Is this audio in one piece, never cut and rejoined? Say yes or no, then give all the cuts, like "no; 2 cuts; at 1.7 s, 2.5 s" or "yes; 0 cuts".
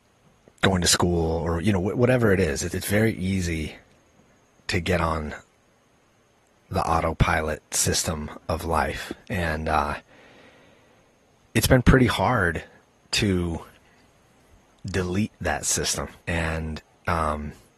no; 2 cuts; at 2.7 s, 16.2 s